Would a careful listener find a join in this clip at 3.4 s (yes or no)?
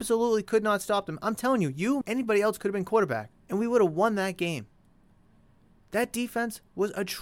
yes